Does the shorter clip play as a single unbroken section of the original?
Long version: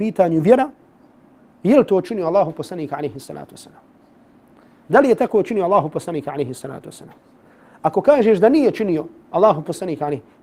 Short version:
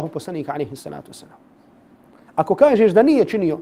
no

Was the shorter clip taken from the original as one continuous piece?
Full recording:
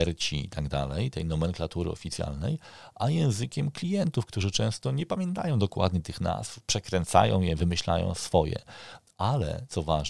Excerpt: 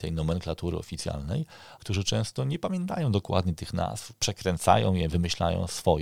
no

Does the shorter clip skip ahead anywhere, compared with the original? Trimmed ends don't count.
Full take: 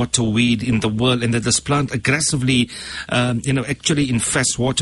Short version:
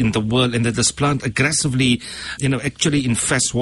yes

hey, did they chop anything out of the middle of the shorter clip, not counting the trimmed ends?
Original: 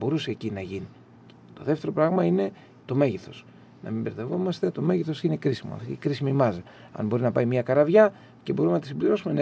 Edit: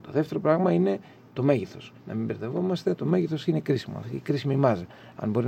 yes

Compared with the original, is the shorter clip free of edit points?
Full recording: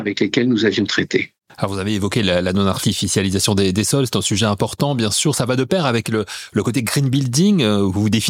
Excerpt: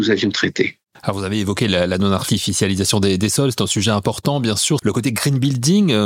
no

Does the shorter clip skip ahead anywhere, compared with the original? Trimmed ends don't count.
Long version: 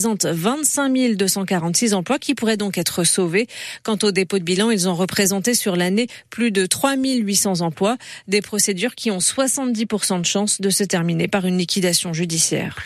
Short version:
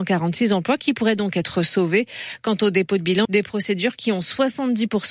yes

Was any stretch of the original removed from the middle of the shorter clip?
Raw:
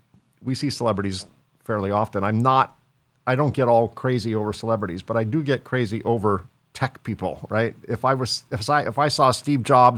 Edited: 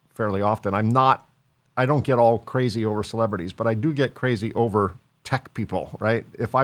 no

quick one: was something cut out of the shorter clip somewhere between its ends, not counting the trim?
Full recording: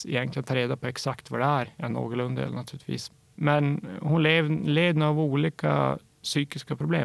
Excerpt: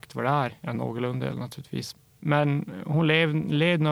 no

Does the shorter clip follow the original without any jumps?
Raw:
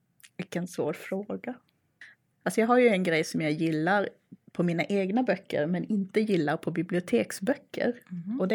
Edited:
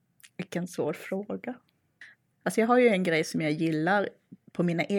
yes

